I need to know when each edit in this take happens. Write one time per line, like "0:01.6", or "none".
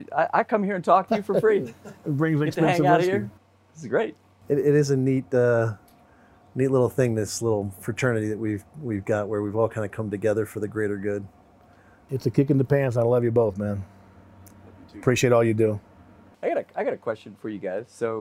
none